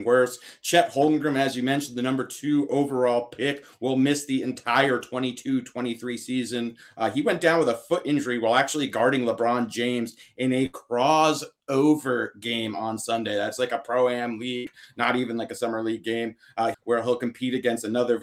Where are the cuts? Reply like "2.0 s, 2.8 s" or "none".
16.7 s